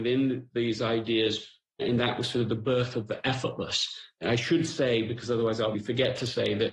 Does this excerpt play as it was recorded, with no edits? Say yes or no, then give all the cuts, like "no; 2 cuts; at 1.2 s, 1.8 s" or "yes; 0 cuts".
no; 2 cuts; at 1.8 s, 5.7 s